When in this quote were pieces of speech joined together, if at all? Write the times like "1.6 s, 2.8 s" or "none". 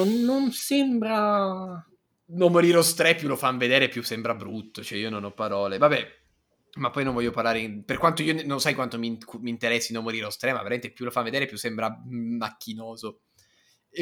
none